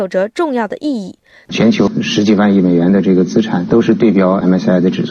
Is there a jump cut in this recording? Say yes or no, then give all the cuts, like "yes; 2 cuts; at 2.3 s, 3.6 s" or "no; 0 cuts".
yes; 1 cut; at 1.5 s